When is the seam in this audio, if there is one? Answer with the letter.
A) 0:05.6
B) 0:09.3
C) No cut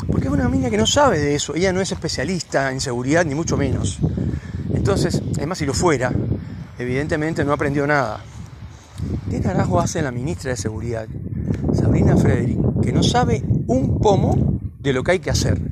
B